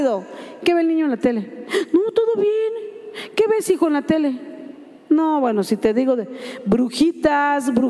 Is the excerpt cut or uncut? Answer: uncut